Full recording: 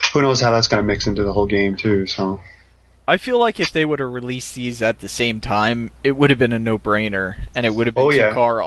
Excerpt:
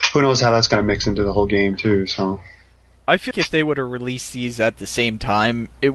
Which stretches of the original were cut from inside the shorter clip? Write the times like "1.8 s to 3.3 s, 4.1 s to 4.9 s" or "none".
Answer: 3.3 s to 3.5 s